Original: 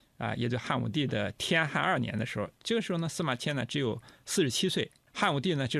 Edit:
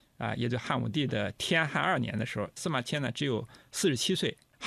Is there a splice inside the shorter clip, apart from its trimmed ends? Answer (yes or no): yes